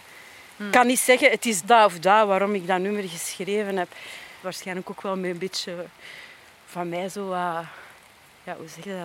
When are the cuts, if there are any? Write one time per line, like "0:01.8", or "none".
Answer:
0:01.6
0:04.4